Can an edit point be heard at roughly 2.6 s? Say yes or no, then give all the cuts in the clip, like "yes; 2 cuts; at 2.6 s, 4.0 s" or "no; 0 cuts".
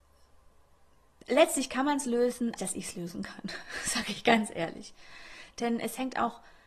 yes; 1 cut; at 2.6 s